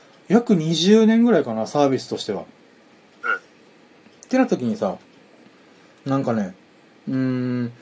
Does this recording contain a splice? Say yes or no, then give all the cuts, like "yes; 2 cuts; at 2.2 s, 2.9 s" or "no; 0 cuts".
no; 0 cuts